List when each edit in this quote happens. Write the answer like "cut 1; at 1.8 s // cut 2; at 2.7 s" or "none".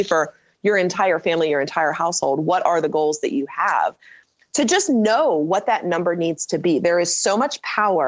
none

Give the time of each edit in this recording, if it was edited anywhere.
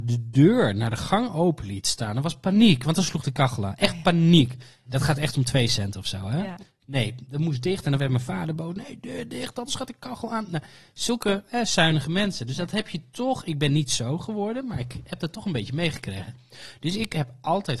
none

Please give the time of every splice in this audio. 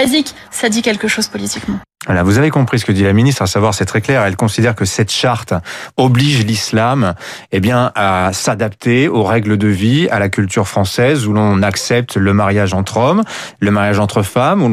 none

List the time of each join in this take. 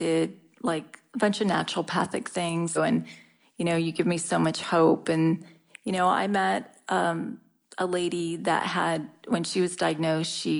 cut 1; at 2.7 s

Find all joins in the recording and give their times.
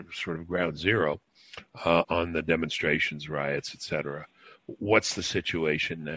cut 1; at 2.0 s

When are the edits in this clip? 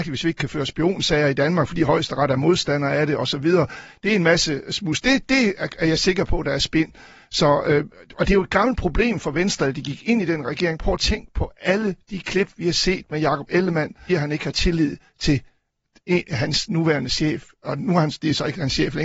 cut 1; at 14.1 s

